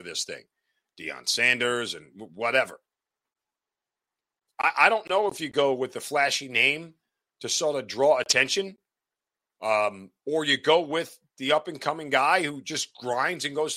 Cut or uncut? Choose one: uncut